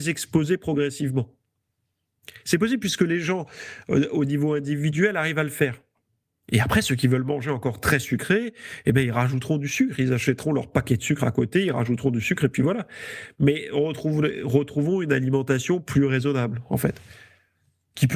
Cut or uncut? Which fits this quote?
uncut